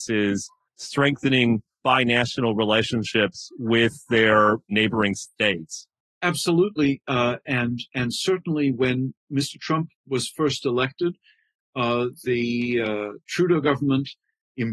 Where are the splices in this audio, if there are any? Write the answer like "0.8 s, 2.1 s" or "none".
none